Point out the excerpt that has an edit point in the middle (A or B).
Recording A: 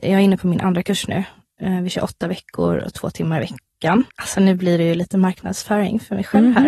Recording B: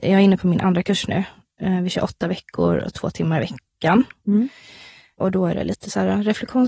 A